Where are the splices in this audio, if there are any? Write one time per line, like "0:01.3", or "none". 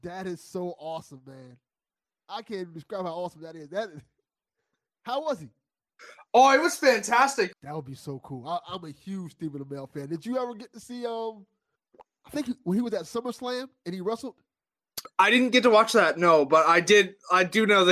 0:07.5